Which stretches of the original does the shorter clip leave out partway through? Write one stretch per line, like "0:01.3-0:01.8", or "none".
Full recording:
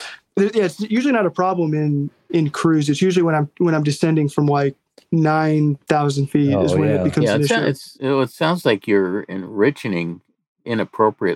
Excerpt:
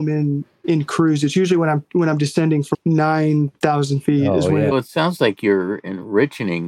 0:04.4-0:05.0
0:07.0-0:08.2